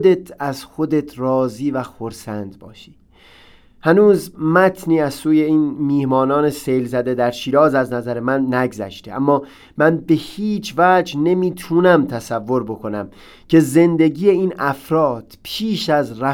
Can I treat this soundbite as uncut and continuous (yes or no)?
yes